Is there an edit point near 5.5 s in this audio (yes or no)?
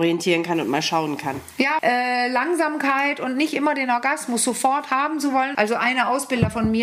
yes